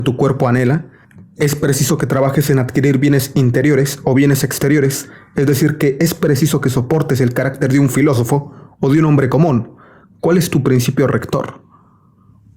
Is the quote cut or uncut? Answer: uncut